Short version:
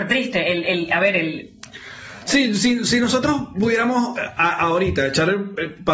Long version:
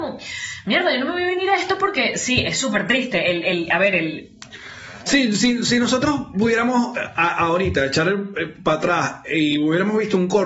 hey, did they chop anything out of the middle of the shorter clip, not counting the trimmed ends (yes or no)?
no